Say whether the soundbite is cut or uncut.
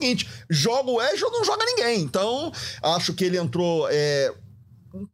uncut